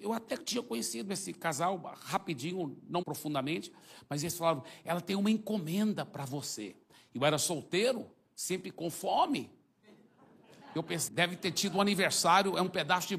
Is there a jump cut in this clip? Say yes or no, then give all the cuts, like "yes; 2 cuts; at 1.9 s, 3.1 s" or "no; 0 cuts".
yes; 2 cuts; at 3.0 s, 11.1 s